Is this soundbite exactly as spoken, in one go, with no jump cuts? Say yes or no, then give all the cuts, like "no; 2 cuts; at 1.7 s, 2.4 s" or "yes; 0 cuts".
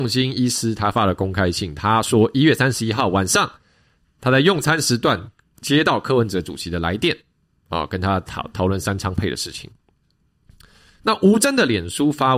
yes; 0 cuts